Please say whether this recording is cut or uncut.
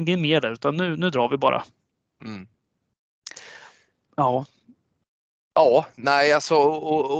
uncut